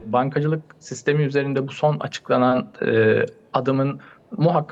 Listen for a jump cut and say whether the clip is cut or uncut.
uncut